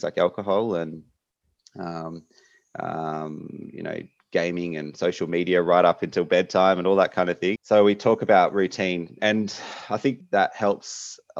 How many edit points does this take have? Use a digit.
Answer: 3